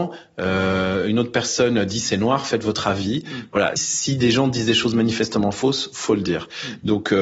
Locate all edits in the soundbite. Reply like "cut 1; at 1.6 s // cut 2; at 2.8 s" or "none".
cut 1; at 3.8 s